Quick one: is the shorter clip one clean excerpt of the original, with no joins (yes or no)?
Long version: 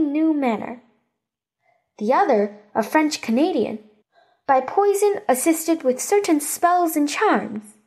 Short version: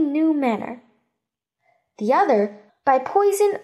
no